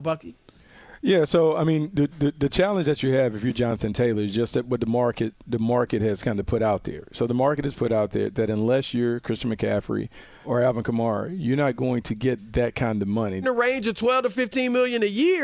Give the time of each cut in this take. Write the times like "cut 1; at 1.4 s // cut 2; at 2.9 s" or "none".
cut 1; at 10.4 s // cut 2; at 13.4 s